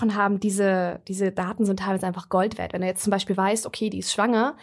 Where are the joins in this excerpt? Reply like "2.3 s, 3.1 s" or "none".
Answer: none